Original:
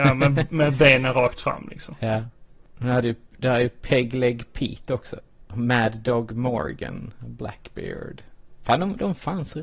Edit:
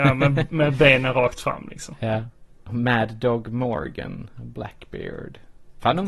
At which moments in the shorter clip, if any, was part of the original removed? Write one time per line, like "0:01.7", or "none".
0:02.6